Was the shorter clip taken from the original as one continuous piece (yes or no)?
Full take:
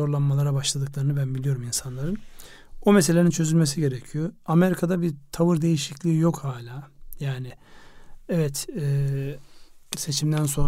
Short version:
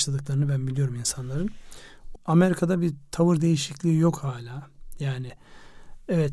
no